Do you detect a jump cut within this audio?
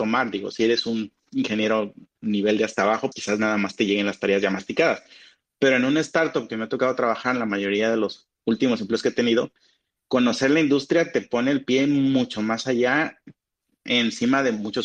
yes; 1 cut; at 3.1 s

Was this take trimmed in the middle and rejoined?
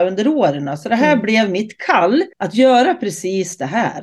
yes; 1 cut; at 2.3 s

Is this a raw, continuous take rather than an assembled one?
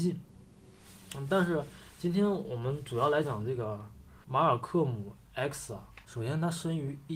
no; 1 cut; at 3.2 s

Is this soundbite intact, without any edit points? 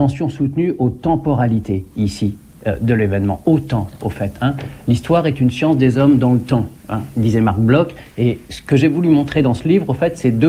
no; 1 cut; at 6.8 s

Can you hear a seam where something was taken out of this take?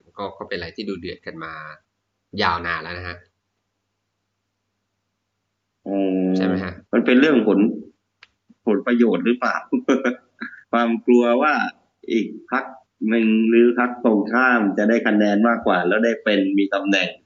yes; 2 cuts; at 6.8 s, 10.6 s

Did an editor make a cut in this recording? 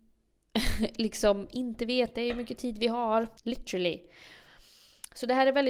yes; 1 cut; at 3.4 s

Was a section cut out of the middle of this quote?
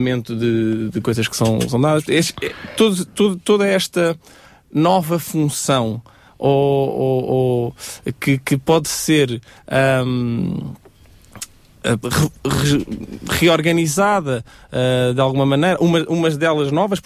yes; 1 cut; at 12.0 s

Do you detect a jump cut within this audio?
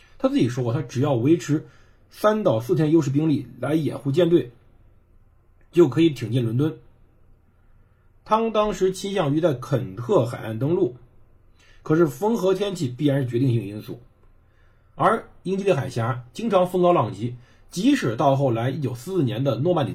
no; 0 cuts

